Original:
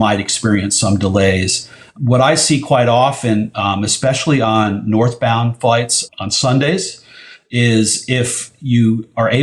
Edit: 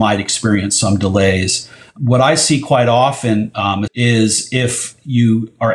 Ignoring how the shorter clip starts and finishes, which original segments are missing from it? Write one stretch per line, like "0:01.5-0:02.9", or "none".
0:03.9-0:07.4